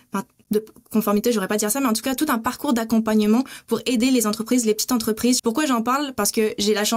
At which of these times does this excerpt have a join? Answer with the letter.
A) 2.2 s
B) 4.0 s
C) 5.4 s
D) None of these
C